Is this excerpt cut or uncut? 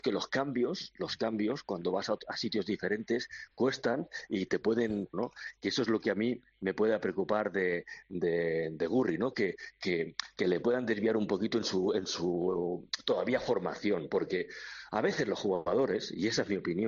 cut